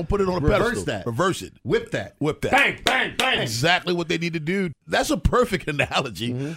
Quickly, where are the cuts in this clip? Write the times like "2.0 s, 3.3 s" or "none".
3.4 s, 4.7 s